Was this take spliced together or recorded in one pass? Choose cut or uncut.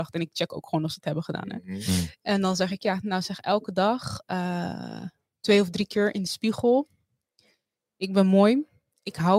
uncut